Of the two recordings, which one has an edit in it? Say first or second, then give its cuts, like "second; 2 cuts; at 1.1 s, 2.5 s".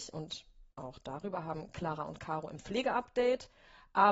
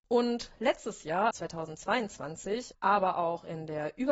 second; 2 cuts; at 1.3 s, 2.7 s